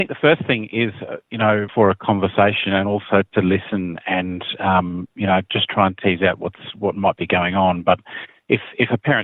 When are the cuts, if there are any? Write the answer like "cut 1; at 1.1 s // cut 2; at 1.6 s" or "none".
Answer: cut 1; at 1.7 s